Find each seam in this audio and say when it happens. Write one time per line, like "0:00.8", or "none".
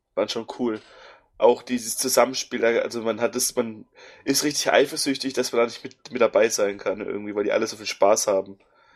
none